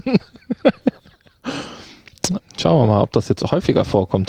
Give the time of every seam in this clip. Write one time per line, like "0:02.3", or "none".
0:02.4